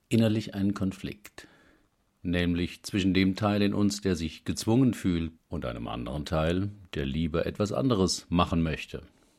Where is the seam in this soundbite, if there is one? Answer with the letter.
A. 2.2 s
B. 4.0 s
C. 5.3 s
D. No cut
C